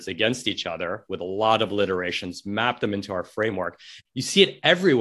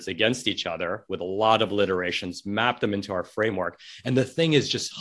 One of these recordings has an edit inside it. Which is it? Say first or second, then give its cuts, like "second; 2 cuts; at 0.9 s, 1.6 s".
first; 1 cut; at 4.0 s